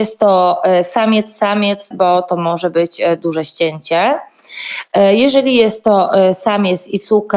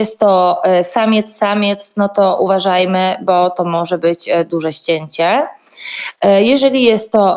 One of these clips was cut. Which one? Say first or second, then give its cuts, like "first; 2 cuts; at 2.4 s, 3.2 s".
first; 1 cut; at 1.9 s